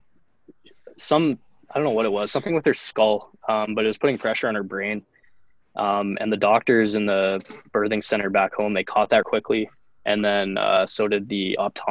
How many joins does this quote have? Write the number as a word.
one